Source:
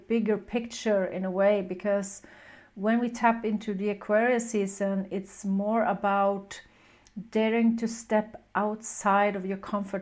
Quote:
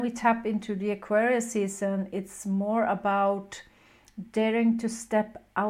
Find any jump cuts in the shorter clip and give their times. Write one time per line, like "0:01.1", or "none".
none